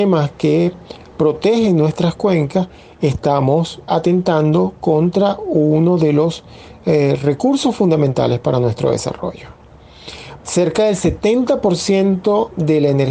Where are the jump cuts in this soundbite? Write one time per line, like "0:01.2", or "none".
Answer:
0:03.9
0:10.4